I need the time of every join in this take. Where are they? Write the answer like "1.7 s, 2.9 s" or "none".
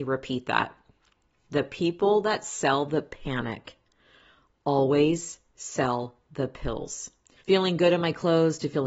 7.4 s